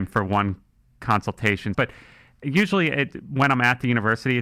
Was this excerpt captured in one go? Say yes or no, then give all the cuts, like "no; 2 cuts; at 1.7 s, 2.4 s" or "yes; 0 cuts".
no; 1 cut; at 1.7 s